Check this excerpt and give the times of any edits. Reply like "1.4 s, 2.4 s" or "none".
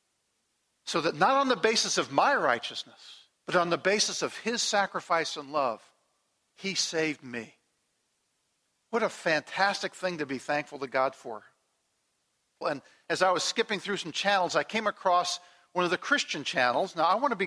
3.4 s, 12.6 s